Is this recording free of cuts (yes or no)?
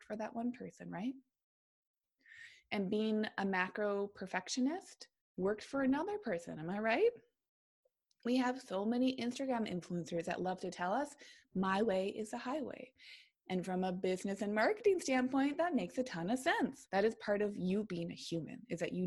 no